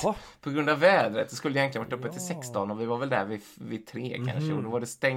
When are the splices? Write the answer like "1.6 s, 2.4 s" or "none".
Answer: none